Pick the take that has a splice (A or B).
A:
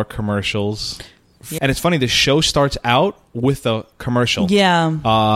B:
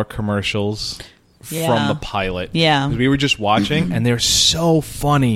A